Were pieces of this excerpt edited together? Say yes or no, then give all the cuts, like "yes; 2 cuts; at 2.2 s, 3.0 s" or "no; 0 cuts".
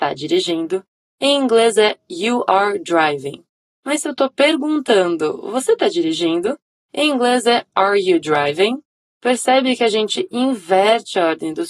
no; 0 cuts